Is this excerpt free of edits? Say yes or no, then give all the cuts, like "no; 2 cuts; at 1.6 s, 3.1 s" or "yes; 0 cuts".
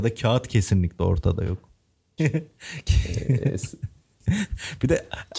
no; 1 cut; at 2.2 s